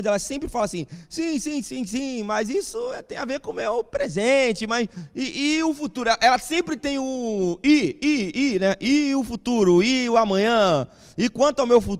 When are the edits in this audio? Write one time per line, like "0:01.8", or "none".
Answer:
none